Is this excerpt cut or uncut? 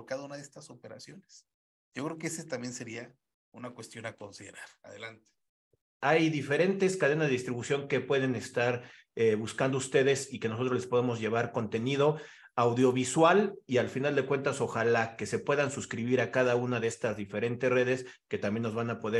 cut